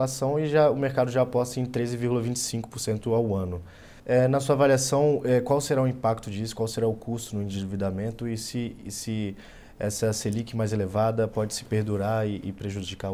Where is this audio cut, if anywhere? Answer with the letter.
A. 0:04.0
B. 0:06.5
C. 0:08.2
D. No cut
A